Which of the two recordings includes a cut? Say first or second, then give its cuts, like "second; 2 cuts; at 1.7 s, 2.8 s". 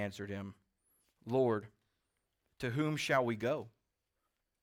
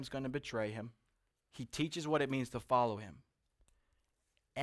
second; 1 cut; at 1.3 s